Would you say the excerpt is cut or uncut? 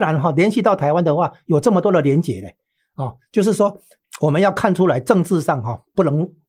uncut